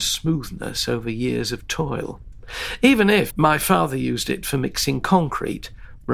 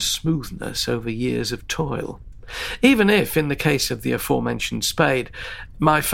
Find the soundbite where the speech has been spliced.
first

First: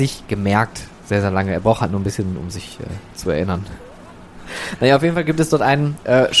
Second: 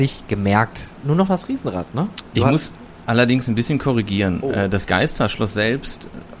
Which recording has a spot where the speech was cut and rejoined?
second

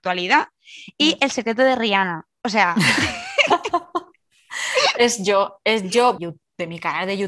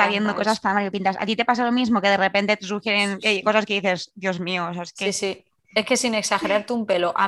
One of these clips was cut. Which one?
first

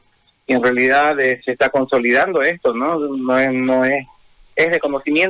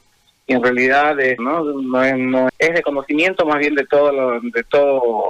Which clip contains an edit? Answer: second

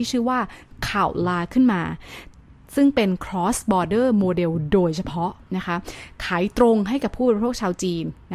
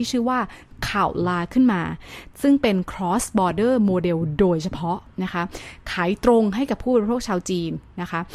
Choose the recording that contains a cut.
second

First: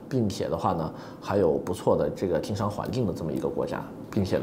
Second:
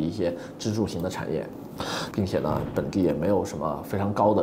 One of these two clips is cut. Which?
second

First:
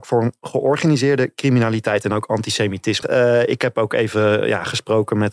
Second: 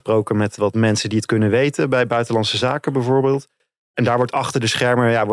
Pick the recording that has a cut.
first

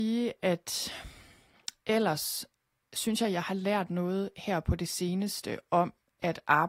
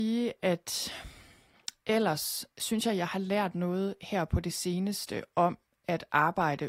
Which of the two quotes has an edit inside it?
second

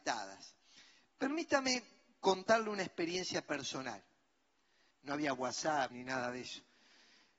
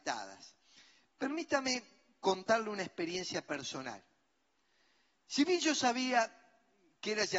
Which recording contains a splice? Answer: first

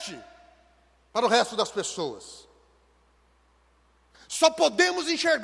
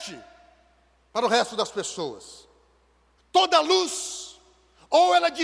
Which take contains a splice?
second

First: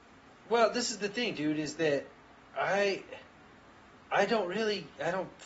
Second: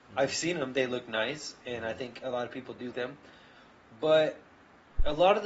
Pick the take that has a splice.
second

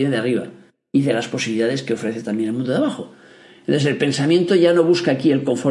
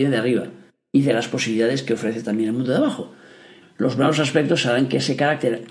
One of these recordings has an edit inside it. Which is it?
second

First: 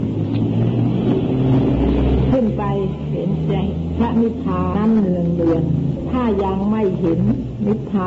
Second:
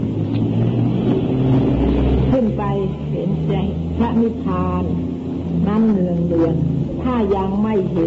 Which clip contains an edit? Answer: first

